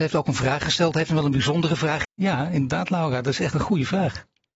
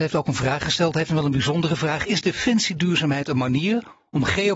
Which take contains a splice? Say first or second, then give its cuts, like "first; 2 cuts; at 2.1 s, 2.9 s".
first; 1 cut; at 2.0 s